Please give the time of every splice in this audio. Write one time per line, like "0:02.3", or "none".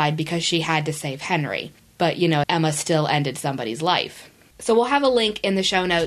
0:02.4
0:04.5

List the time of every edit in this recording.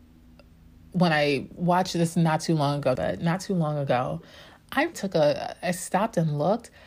0:03.0
0:04.9

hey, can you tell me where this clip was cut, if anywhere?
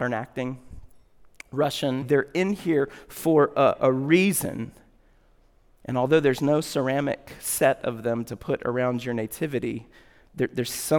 0:02.0

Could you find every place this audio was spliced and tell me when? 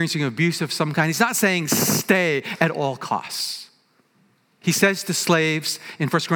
0:04.6

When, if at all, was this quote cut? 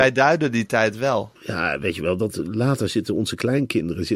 0:01.4

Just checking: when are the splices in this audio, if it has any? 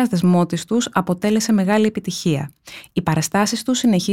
none

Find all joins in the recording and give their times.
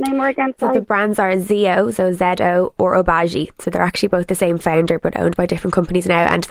0:02.8

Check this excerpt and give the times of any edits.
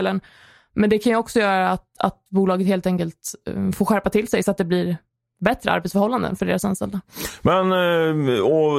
none

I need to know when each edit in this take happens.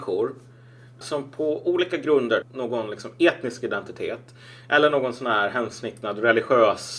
0:01.0
0:02.4

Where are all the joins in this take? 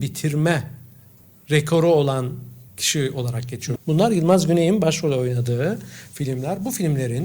0:02.7
0:03.8

